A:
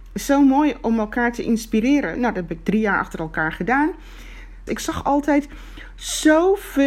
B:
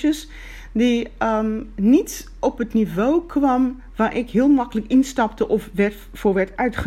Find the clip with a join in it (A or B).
A